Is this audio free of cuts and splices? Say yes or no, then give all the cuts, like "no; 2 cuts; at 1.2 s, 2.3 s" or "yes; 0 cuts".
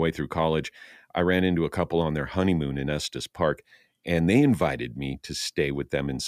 yes; 0 cuts